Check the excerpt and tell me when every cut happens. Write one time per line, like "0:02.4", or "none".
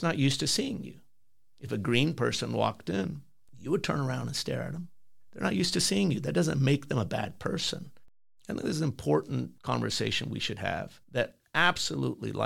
0:08.4